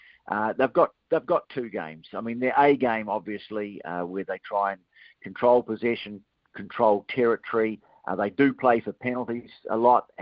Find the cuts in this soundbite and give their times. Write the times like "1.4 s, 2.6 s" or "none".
none